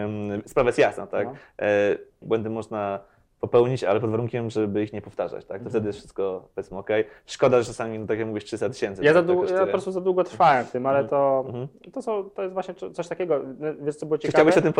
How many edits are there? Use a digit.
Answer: 1